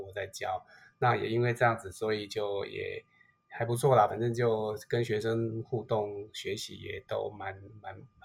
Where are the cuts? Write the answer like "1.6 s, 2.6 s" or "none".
none